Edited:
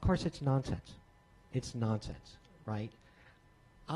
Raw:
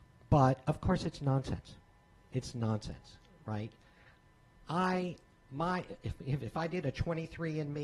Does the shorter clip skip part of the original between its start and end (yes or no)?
no